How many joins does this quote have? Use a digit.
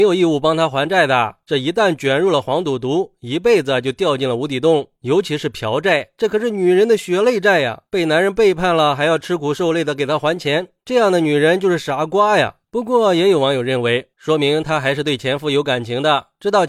2